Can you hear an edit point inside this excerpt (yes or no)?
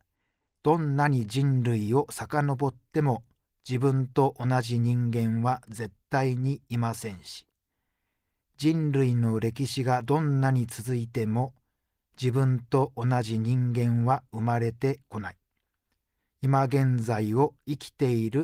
no